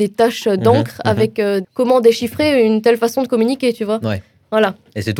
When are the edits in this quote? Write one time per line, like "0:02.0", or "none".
0:01.6

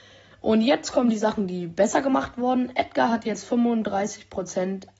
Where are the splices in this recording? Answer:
none

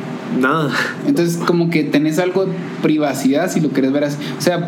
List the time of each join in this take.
none

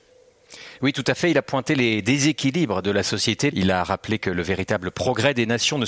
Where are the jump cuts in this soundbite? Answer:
0:03.5

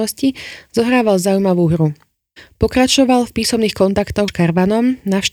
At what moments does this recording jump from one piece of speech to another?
0:04.3

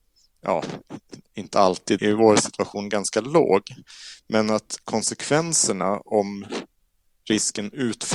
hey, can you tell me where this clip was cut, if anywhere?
0:02.0

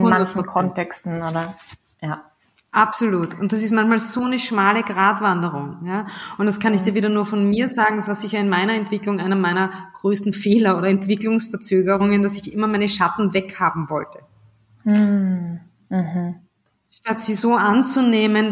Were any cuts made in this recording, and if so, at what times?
none

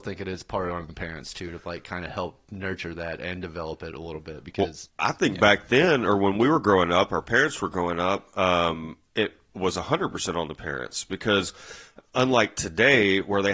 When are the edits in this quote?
0:04.9

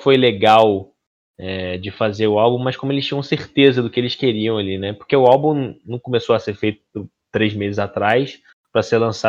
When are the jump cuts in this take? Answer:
none

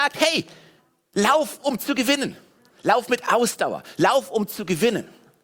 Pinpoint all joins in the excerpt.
0:02.7

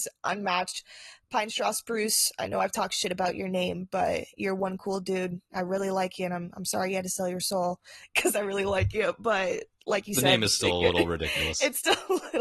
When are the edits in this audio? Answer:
none

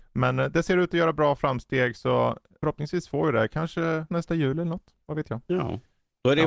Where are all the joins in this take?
0:04.1

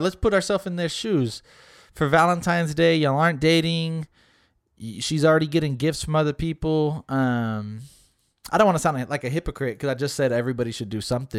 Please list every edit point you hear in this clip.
none

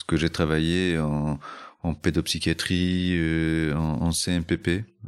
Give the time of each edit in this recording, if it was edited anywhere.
none

